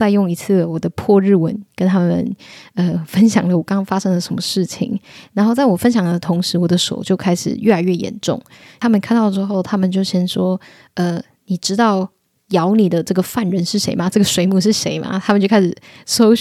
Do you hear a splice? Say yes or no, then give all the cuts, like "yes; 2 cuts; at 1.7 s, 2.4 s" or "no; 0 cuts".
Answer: no; 0 cuts